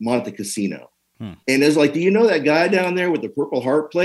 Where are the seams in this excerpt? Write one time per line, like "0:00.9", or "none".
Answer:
0:01.4